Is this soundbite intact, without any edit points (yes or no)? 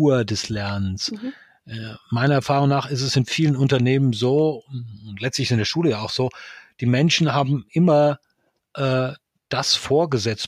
no